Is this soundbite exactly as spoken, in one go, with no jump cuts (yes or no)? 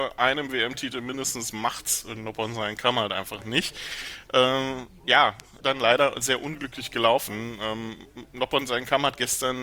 no